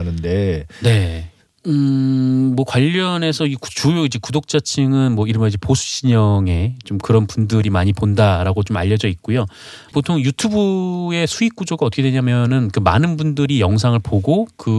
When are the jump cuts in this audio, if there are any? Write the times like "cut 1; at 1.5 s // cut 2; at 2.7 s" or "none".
cut 1; at 1.5 s // cut 2; at 9.9 s